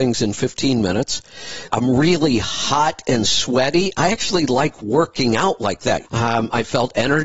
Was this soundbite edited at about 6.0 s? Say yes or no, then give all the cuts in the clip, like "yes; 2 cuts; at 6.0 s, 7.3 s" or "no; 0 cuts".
yes; 2 cuts; at 1.7 s, 6.0 s